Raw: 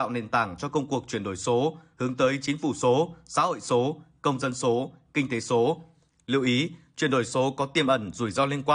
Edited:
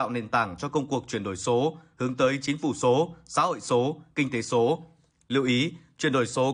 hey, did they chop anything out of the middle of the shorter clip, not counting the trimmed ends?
yes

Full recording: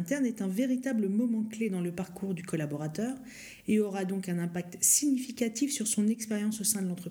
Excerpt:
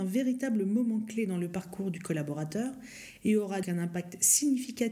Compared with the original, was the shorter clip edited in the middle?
yes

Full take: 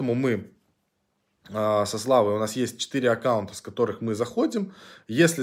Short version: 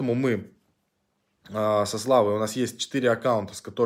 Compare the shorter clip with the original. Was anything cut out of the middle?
no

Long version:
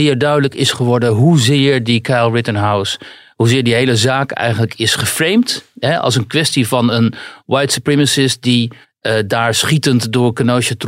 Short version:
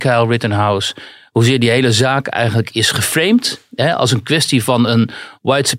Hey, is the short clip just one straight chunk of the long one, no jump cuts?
yes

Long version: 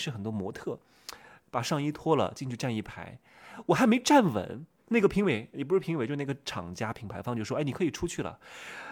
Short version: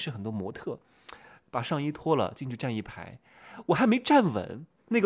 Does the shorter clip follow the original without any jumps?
yes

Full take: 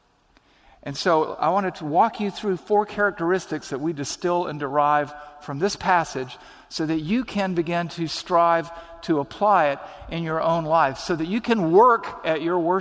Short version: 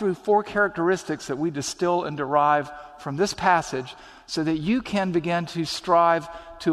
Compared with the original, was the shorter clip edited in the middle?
no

